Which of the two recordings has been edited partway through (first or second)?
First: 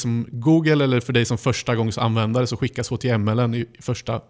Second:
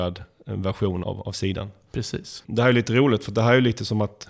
second